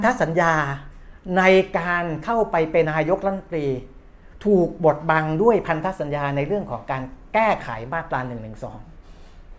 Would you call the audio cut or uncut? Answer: cut